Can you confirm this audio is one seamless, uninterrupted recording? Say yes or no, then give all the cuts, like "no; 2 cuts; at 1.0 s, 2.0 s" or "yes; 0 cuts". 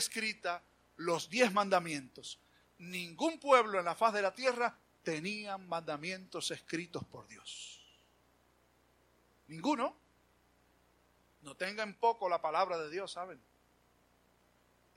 yes; 0 cuts